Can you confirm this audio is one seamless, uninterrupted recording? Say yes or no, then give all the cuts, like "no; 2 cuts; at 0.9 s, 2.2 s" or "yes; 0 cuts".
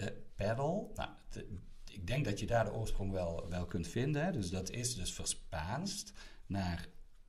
yes; 0 cuts